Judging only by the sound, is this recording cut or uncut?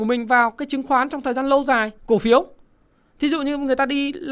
cut